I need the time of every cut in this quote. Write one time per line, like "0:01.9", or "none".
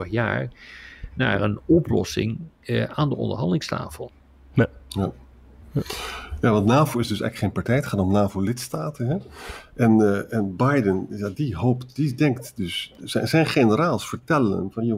none